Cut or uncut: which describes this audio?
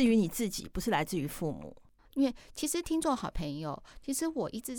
cut